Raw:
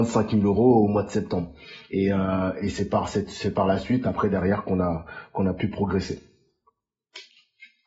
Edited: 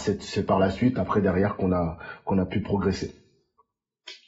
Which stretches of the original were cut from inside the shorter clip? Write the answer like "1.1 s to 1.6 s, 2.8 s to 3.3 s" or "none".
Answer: none